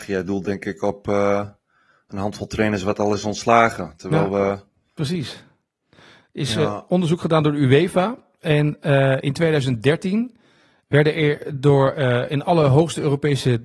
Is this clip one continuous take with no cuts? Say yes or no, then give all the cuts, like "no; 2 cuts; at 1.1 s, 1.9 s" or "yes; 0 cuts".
yes; 0 cuts